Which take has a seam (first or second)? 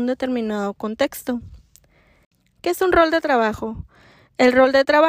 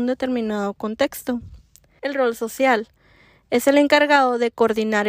second